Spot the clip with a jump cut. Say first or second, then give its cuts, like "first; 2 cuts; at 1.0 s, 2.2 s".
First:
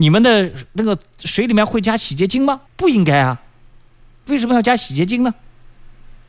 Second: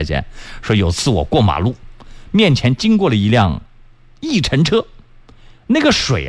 first; 1 cut; at 2.7 s